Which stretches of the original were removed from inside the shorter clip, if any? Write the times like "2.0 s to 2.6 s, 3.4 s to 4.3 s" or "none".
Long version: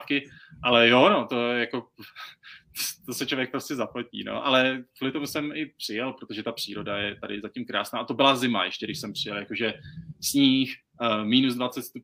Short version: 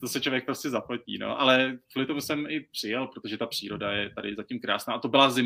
none